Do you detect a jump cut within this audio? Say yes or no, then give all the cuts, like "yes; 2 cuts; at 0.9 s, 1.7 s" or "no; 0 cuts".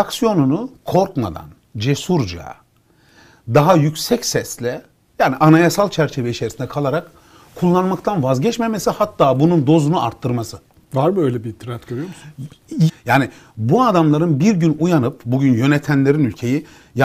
yes; 1 cut; at 12.9 s